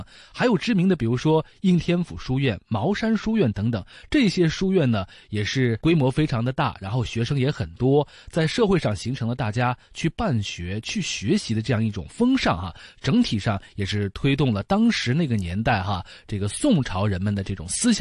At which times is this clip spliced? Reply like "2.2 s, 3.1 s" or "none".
none